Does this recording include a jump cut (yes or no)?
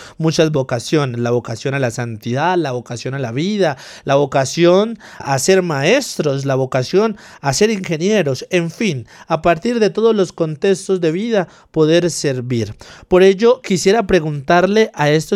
yes